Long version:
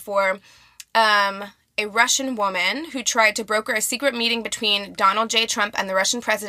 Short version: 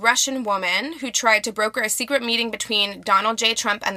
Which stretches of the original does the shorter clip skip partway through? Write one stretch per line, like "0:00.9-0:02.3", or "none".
none